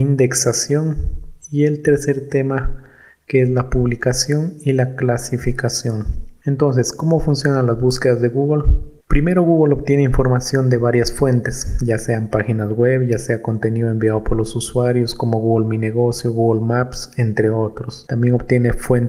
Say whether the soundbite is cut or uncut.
uncut